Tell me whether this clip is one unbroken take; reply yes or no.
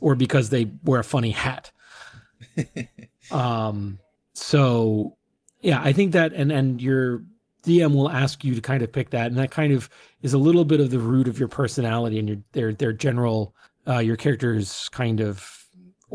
yes